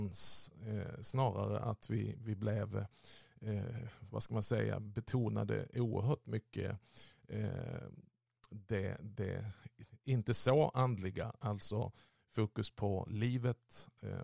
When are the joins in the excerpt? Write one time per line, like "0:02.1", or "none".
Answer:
none